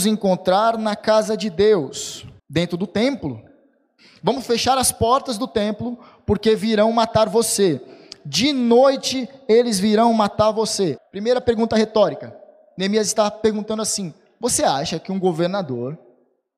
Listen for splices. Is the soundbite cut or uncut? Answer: cut